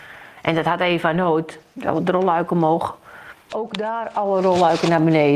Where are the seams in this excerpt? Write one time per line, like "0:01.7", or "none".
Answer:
0:03.5

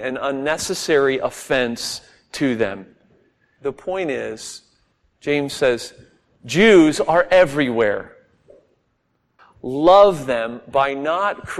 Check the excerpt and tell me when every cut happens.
0:03.6
0:09.4

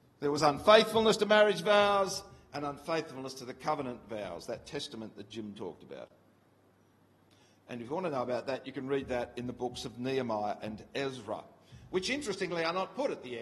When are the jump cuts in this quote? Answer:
none

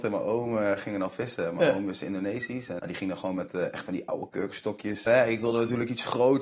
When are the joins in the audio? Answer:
0:02.8
0:05.1

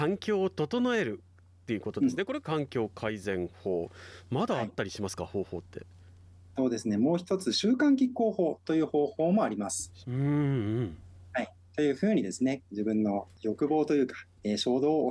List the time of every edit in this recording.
0:10.0

